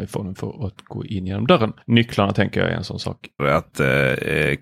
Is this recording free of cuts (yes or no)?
no